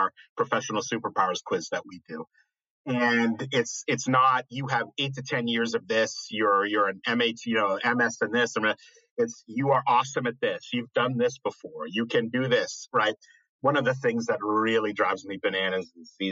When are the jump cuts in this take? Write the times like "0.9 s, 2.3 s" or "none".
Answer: none